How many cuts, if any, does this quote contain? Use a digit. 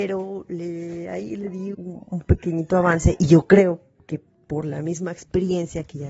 1